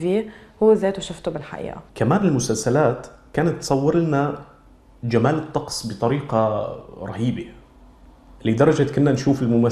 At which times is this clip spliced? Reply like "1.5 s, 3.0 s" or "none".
1.9 s